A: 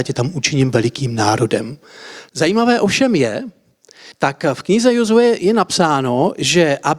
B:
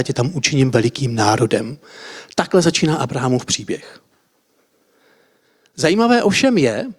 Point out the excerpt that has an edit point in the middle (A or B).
A